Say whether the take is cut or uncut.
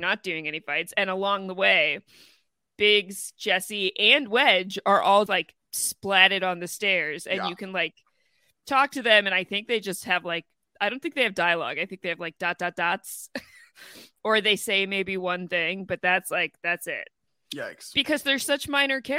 cut